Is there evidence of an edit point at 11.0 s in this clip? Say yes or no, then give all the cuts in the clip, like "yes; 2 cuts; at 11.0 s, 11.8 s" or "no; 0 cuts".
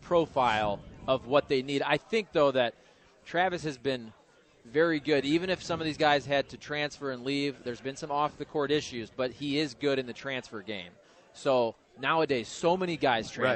no; 0 cuts